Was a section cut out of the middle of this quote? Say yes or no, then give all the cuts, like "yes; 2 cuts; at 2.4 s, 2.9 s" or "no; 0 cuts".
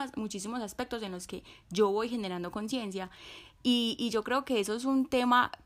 no; 0 cuts